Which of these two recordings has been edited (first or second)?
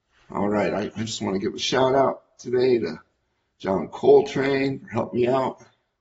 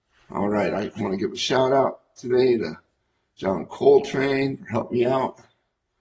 second